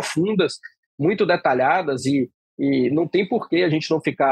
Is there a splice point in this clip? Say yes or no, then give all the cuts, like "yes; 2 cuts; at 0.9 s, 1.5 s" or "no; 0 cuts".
no; 0 cuts